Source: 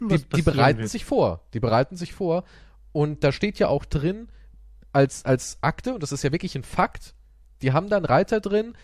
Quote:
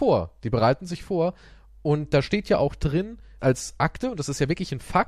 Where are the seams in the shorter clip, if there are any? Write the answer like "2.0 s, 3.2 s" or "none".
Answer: 3.4 s